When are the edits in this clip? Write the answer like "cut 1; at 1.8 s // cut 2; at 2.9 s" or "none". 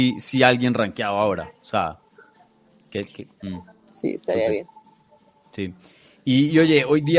cut 1; at 3.3 s